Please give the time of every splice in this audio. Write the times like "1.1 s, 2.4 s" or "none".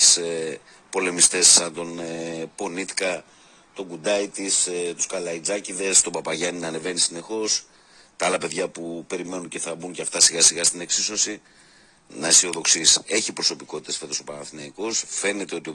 12.1 s